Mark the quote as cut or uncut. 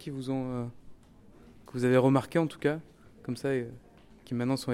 uncut